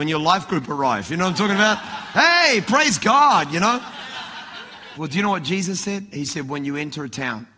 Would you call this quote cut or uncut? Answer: cut